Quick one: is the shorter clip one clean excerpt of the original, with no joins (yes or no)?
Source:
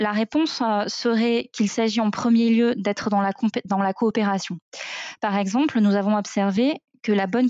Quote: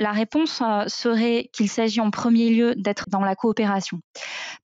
no